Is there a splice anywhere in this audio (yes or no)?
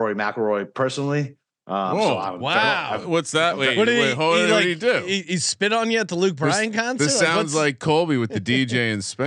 no